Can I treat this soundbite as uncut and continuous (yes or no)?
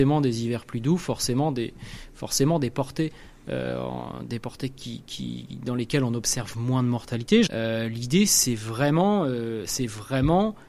no